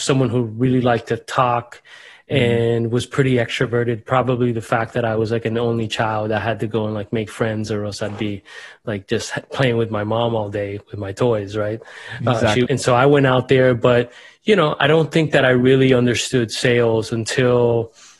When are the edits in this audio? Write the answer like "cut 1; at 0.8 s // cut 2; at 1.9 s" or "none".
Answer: cut 1; at 12.7 s